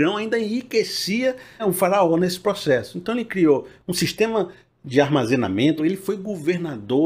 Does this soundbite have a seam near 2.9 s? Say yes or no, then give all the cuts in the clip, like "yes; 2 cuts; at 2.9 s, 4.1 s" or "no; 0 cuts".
no; 2 cuts; at 1.6 s, 5.8 s